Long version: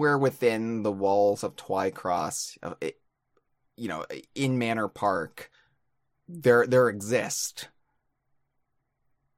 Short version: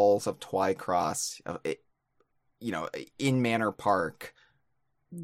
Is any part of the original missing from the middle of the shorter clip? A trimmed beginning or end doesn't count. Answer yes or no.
no